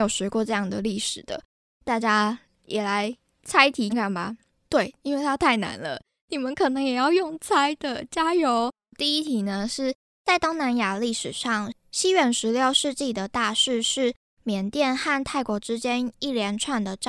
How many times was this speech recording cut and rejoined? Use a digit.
1